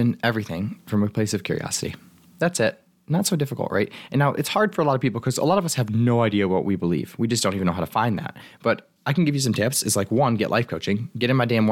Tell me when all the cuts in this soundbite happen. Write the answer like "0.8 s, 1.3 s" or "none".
none

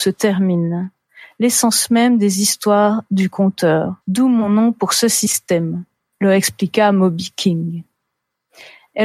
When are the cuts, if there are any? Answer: 4.0 s

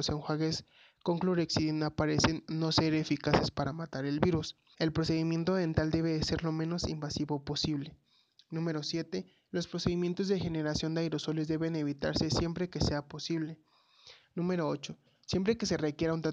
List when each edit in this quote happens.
4.7 s

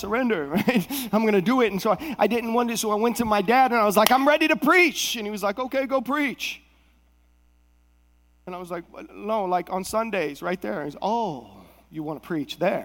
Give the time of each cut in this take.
none

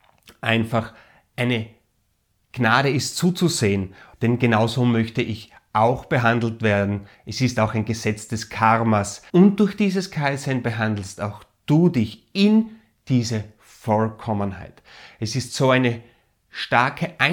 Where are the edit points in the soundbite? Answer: 4.1 s, 9.3 s

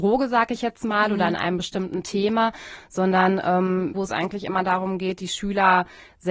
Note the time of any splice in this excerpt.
3.9 s

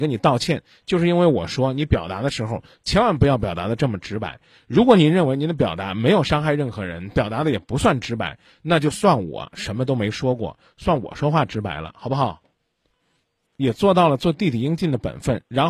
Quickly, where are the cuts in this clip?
13.5 s

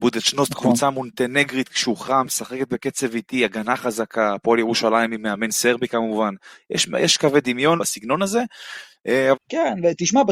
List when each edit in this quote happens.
7.8 s, 9.3 s

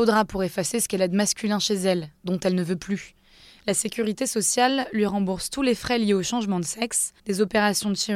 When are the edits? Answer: 7.2 s

